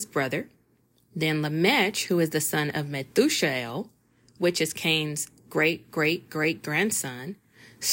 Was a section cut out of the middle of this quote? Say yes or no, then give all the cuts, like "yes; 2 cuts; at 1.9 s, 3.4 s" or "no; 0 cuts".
no; 0 cuts